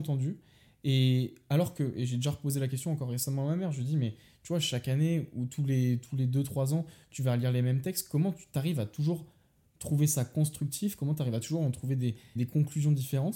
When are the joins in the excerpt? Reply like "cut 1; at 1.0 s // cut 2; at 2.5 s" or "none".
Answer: cut 1; at 12.4 s